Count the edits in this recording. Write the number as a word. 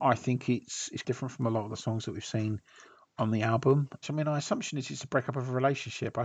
two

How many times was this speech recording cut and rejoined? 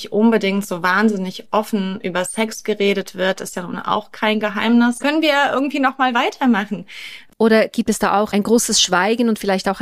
two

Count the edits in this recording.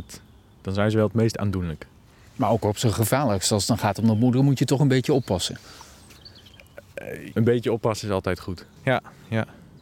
two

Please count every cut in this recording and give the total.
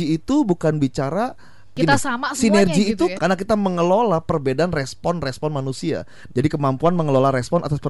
two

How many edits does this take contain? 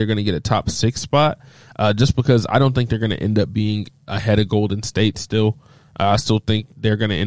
zero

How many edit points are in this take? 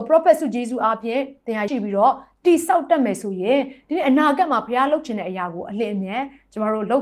one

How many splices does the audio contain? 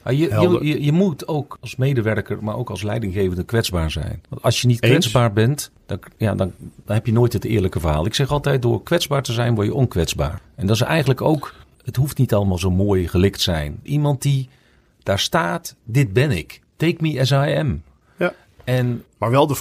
two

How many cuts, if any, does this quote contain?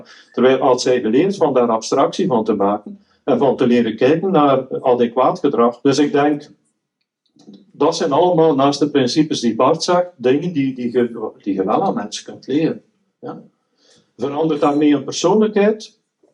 one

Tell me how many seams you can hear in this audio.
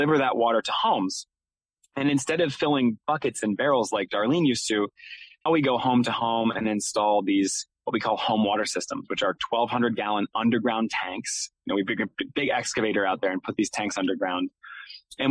one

